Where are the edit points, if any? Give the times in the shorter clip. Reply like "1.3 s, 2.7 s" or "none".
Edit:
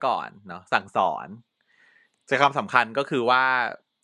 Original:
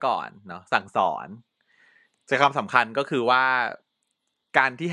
none